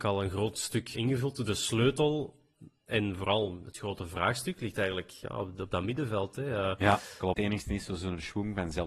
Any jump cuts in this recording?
yes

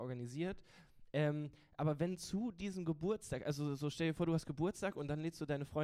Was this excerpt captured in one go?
yes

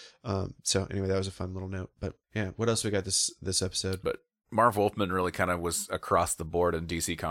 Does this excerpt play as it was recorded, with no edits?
no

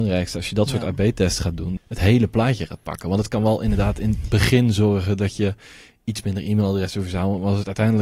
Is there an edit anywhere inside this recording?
yes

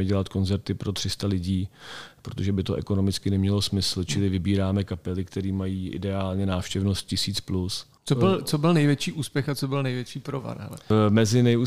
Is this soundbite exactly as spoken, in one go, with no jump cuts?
yes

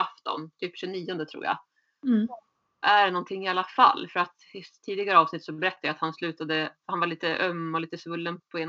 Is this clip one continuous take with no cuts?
no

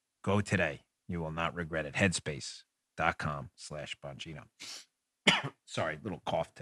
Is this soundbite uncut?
yes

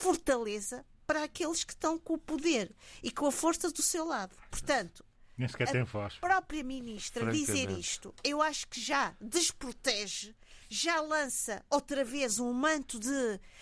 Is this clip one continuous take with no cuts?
no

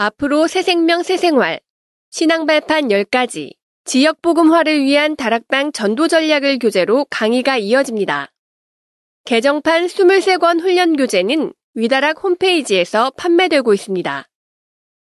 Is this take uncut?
yes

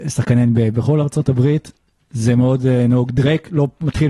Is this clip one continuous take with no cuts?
yes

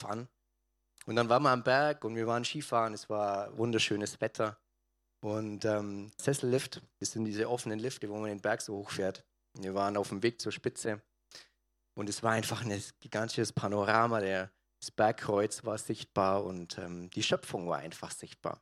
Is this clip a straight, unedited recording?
no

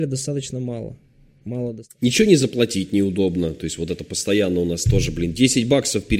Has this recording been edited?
no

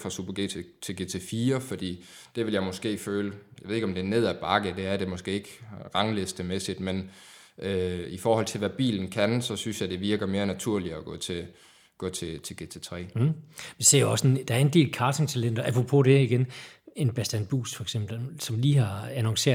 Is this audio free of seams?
yes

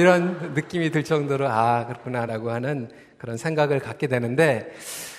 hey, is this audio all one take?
no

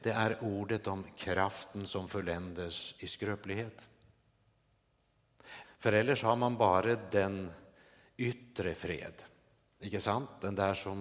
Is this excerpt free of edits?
no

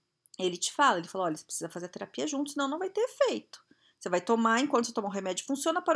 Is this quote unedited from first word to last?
yes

